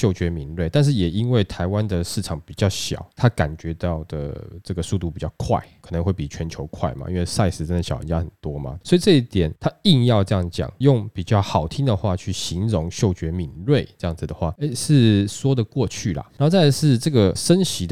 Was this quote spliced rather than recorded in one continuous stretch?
no; 0 cuts

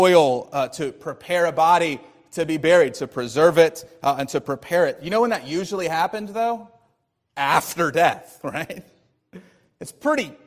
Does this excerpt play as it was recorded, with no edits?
yes; 0 cuts

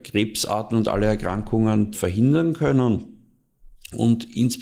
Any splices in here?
yes; 1 cut; at 1.9 s

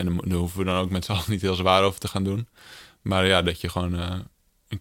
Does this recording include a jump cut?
no; 0 cuts

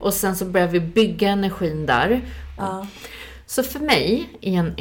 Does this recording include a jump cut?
yes; 1 cut; at 2.6 s

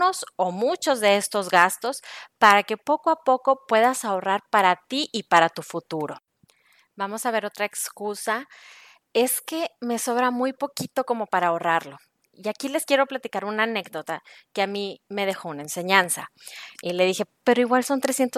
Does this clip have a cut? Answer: yes; 1 cut; at 16.7 s

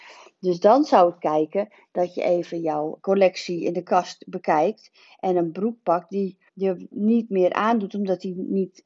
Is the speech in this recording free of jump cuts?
no; 2 cuts; at 3.0 s, 6.5 s

